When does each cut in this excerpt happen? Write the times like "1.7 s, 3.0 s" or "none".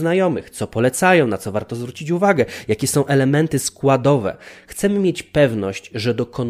none

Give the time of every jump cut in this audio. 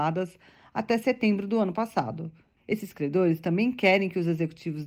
2.6 s

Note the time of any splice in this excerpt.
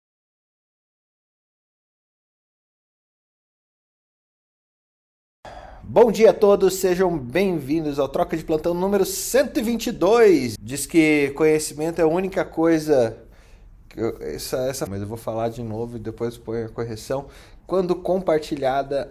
10.6 s, 14.9 s, 17.6 s

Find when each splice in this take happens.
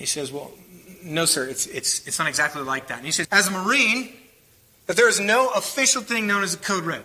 3.2 s

